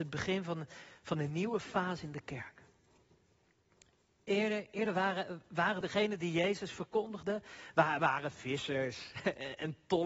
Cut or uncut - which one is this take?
cut